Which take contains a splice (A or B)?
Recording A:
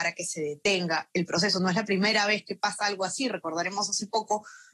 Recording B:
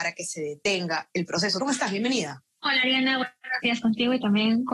B